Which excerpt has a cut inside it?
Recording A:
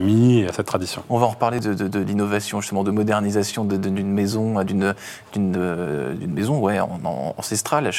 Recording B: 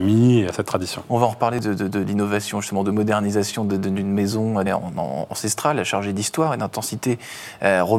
B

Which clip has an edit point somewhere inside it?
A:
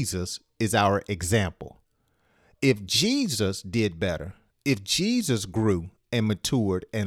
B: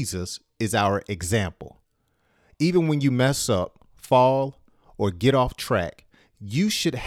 B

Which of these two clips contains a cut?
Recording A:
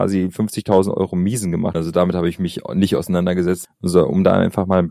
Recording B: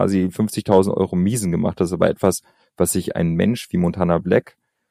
A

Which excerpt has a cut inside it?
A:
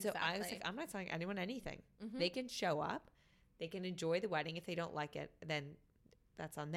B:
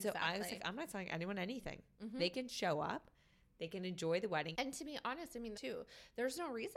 B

